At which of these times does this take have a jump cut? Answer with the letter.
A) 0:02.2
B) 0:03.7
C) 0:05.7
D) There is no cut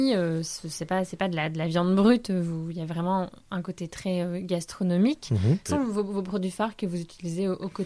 C